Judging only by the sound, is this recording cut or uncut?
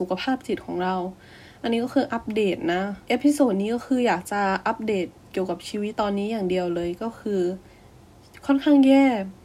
cut